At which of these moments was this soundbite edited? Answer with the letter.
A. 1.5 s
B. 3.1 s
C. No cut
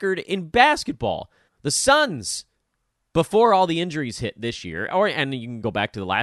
A